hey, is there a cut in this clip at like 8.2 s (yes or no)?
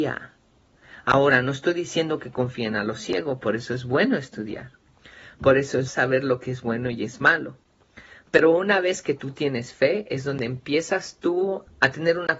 yes